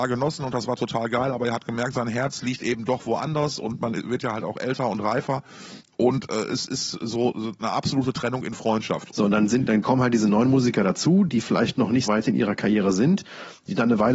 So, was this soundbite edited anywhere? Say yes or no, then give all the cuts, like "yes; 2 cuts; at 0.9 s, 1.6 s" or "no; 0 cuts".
yes; 2 cuts; at 9.1 s, 12.1 s